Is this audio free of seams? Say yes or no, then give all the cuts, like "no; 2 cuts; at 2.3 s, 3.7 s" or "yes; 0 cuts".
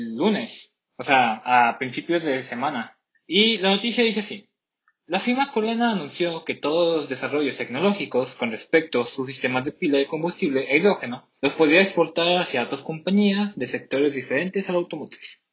yes; 0 cuts